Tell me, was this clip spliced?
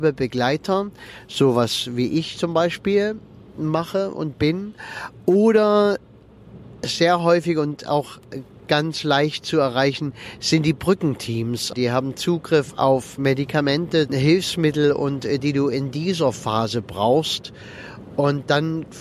yes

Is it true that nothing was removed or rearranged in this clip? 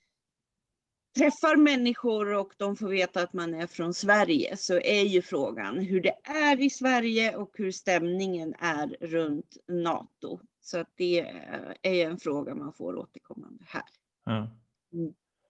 yes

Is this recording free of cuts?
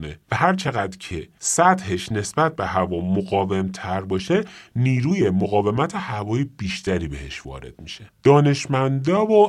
yes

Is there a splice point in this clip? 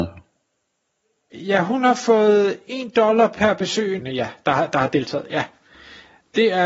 yes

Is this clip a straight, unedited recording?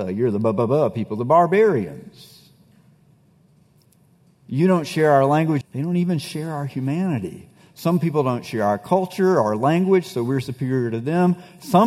no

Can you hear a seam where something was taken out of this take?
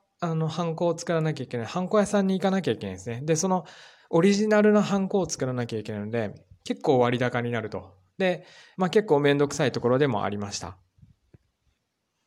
yes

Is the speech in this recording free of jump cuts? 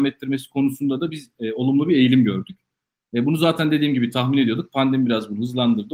yes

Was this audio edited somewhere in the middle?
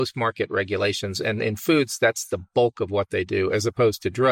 no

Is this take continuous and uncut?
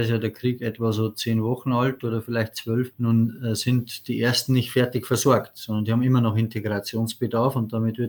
yes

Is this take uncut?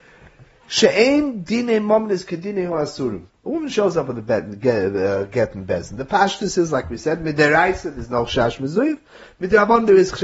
no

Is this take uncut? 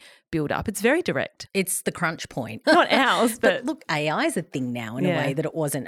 no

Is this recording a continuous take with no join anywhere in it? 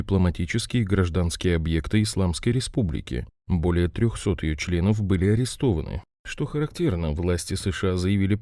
yes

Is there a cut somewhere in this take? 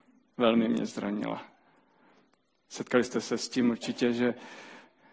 no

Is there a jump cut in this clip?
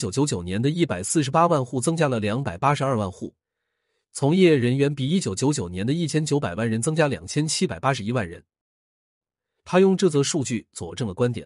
no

